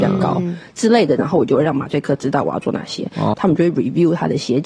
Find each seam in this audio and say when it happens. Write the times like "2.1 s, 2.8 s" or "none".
3.3 s